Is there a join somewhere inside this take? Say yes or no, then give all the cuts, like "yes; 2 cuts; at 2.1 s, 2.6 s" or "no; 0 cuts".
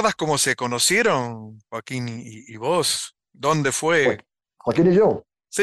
no; 0 cuts